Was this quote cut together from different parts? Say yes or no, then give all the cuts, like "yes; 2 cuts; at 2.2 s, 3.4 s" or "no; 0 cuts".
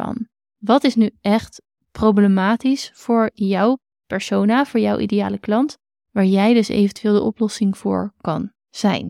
no; 0 cuts